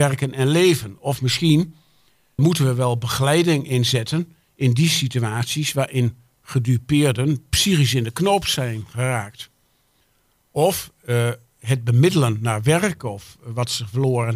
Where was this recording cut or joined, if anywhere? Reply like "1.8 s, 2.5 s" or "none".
2.4 s